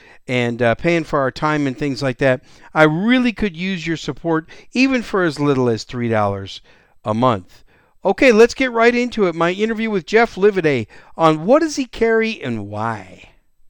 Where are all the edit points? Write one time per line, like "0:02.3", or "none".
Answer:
none